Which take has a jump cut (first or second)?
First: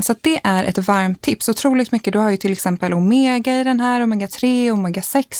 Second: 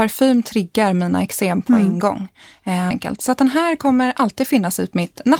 second